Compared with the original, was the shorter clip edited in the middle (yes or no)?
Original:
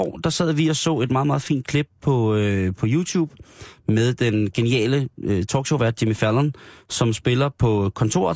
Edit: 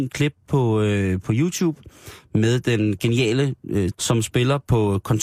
yes